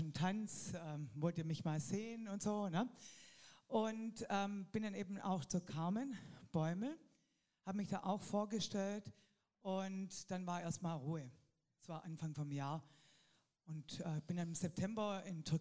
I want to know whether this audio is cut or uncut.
uncut